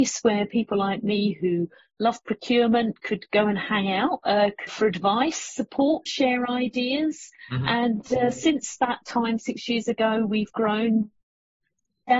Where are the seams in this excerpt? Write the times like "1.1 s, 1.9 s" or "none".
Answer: 4.7 s, 6.1 s

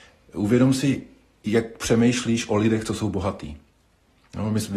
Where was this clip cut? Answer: none

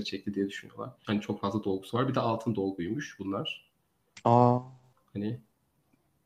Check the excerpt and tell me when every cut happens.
1.0 s, 5.0 s

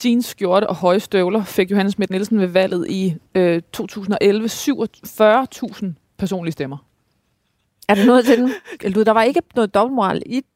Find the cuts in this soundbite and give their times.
3.3 s, 7.0 s, 8.8 s

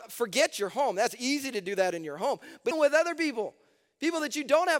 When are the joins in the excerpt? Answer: 2.7 s

